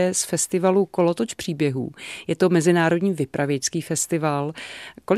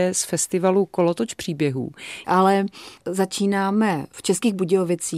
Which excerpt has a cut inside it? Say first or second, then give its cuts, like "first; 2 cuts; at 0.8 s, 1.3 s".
second; 1 cut; at 2.2 s